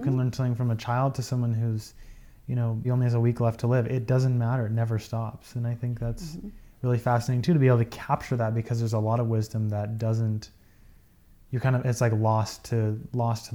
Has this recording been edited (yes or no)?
yes